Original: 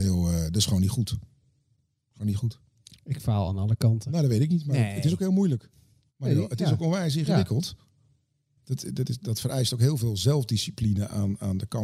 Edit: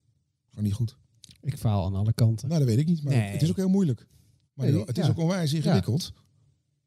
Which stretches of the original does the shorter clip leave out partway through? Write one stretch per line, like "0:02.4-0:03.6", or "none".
none